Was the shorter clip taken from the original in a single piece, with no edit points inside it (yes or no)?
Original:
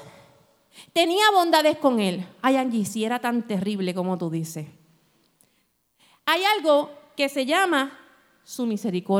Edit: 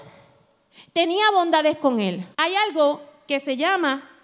no